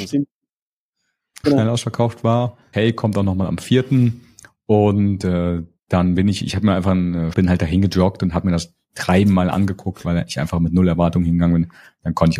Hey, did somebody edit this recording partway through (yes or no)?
yes